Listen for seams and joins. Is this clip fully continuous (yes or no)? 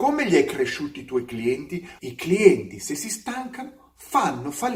no